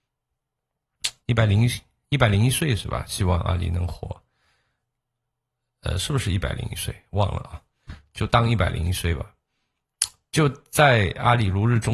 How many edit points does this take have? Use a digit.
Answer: 2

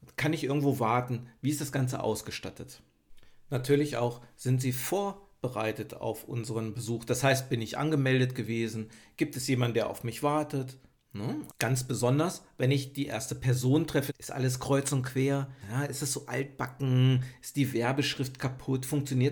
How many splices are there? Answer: 3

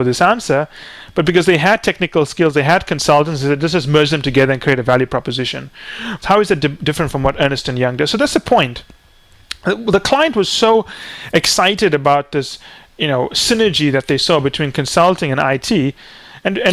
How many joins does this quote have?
1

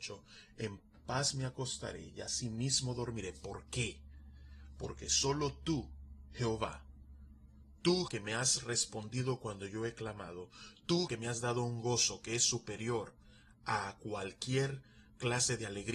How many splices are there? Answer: 2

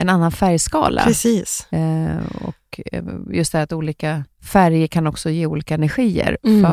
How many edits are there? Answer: 1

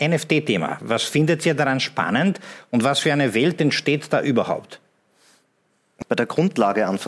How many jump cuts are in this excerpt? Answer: 1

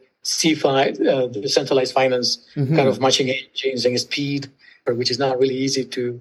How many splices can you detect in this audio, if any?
1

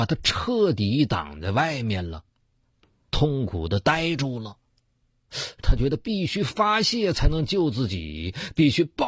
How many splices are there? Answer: 2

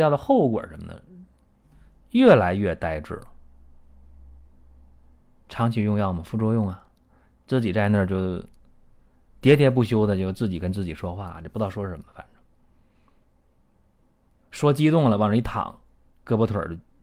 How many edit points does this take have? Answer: 0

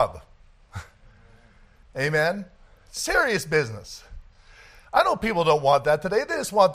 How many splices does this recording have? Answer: 1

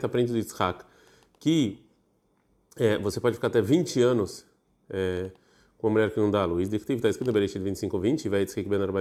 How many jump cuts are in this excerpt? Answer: 0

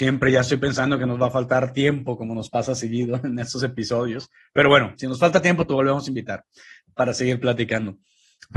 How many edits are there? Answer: 0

